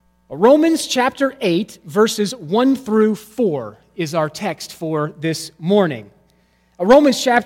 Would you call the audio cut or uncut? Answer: uncut